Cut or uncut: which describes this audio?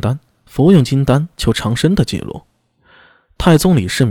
uncut